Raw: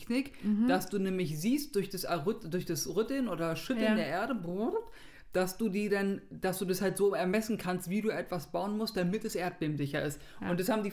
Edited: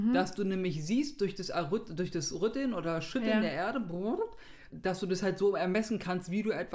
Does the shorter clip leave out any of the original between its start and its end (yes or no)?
yes